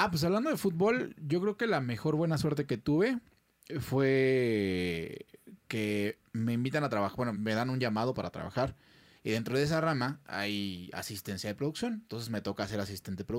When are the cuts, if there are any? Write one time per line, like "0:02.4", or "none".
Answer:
0:07.4
0:09.2

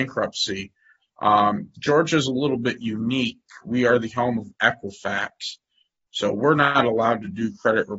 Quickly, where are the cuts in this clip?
0:01.0

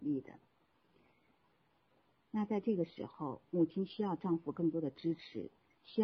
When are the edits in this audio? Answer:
0:02.2

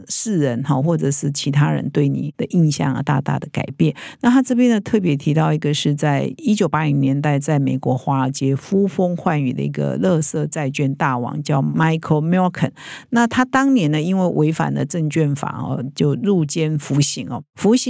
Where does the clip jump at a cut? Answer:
none

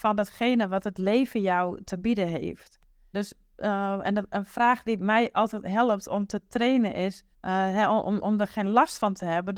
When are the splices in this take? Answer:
0:03.1
0:07.3

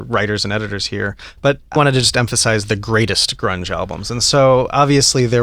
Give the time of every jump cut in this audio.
0:01.8

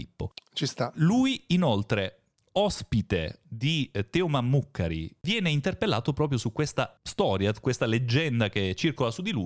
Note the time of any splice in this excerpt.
0:03.4

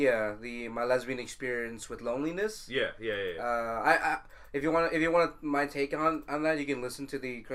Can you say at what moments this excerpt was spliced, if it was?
none

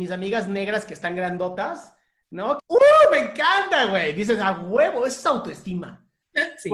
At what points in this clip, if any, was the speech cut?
0:02.6

